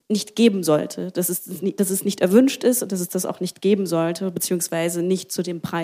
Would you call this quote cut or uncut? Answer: uncut